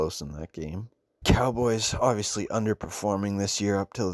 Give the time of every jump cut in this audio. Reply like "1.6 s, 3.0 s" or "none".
1.2 s